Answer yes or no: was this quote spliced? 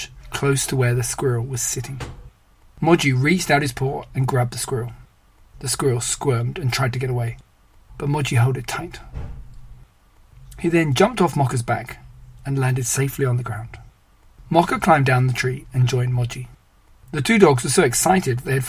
no